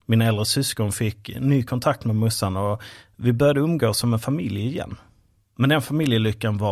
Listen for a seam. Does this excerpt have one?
no; 0 cuts

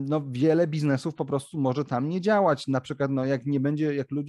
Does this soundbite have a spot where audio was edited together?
no; 0 cuts

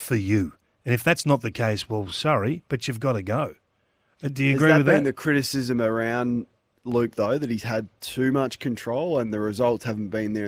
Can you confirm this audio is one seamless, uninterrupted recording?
yes; 0 cuts

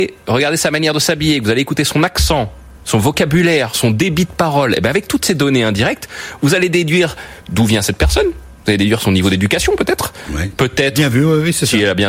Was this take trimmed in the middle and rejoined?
no; 0 cuts

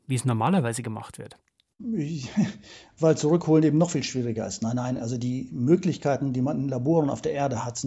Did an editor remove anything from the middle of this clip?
no; 0 cuts

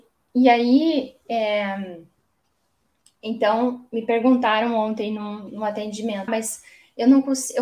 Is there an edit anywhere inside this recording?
yes; 1 cut; at 6.3 s

